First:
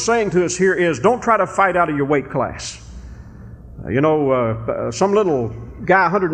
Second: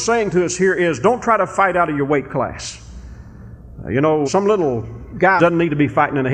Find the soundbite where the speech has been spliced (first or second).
second